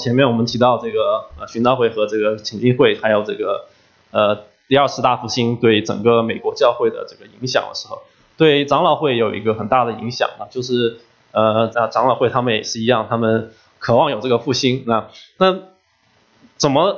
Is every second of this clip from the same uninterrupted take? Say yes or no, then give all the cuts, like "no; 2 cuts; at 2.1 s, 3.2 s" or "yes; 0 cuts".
no; 1 cut; at 11.7 s